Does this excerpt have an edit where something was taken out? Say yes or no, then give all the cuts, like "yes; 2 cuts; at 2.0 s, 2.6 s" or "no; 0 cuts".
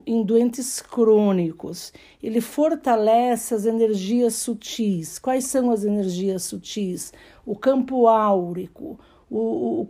no; 0 cuts